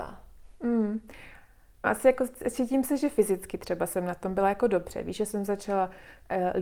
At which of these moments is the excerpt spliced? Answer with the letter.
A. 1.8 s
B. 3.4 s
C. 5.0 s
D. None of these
A